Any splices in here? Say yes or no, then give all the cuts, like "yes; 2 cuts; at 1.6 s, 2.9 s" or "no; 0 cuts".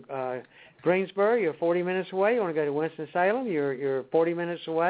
no; 0 cuts